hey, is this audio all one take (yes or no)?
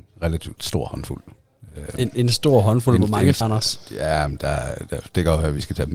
no